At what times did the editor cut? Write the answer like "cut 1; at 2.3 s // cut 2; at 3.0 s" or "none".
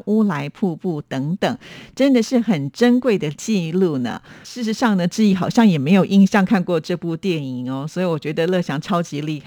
cut 1; at 4.4 s